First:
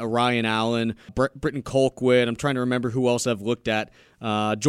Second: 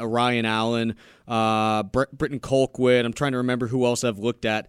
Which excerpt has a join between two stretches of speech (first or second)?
first